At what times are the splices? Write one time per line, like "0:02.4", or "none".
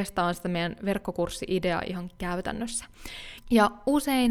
0:03.4